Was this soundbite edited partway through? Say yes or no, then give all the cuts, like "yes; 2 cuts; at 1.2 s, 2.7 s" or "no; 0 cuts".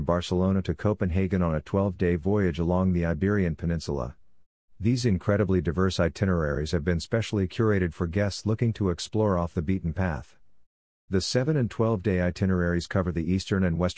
yes; 2 cuts; at 4.6 s, 11.1 s